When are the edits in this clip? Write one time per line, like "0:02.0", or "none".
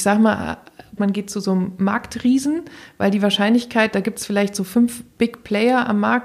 0:01.0